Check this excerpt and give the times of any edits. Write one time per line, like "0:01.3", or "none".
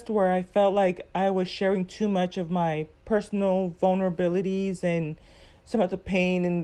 none